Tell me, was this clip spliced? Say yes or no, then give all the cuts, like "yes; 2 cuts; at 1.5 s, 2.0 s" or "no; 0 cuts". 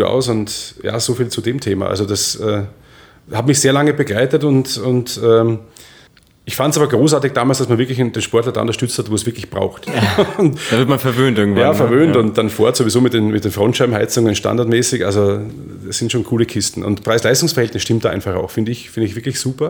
yes; 1 cut; at 9.9 s